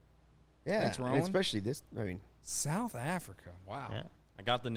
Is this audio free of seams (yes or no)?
yes